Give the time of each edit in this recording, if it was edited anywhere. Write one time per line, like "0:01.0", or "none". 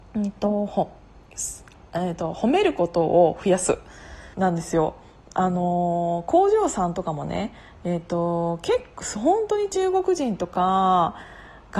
0:04.3